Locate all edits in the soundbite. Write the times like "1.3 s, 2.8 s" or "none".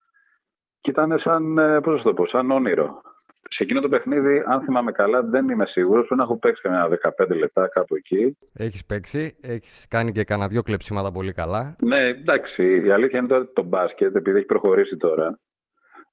none